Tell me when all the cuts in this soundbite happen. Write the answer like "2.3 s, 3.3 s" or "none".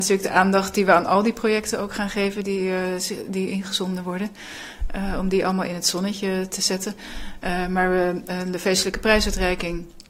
8.3 s